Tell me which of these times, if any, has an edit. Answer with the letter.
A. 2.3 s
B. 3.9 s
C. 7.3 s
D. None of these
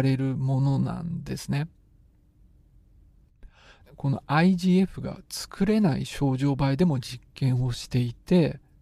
B